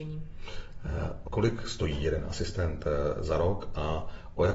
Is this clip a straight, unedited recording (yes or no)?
no